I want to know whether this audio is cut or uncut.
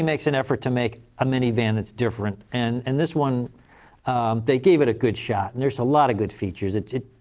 uncut